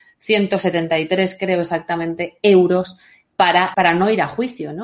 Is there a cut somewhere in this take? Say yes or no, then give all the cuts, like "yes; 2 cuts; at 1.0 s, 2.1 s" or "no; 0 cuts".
yes; 1 cut; at 3.7 s